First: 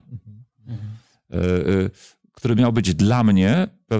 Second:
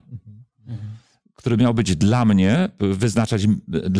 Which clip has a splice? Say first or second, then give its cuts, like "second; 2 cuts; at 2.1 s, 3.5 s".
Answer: second; 2 cuts; at 1.2 s, 2.8 s